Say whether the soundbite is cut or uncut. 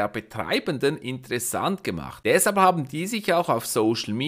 uncut